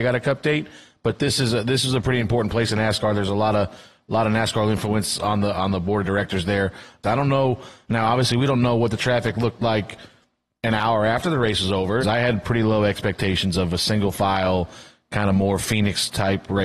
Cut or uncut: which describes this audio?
cut